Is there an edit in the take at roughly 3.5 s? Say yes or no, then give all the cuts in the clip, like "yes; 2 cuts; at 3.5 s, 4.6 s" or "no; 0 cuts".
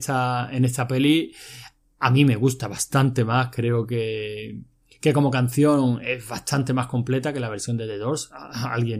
no; 0 cuts